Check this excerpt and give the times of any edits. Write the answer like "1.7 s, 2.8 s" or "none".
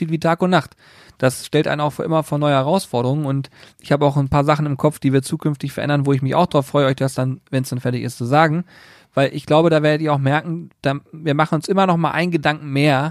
none